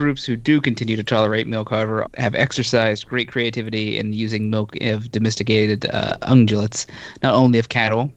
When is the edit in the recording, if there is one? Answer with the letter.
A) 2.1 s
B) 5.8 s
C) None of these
A